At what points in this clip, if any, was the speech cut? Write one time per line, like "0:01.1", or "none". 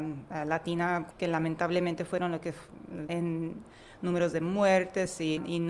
0:01.1
0:03.1

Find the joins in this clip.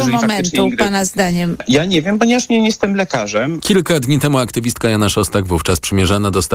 0:03.6

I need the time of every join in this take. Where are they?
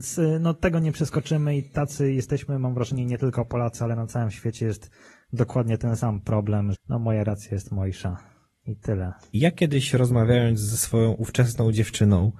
0:06.7
0:09.3

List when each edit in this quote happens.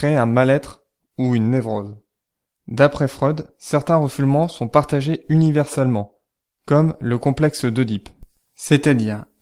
0:02.4

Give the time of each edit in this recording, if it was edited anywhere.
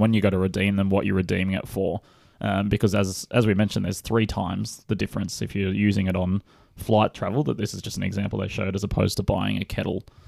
none

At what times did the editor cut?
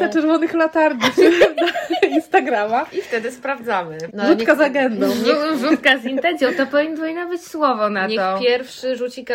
0:04.1

